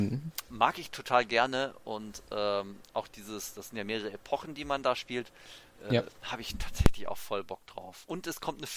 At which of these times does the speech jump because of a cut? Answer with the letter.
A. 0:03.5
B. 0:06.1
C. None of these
C